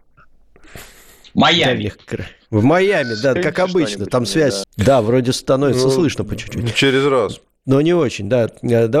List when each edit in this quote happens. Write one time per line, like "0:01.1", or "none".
0:03.4
0:04.6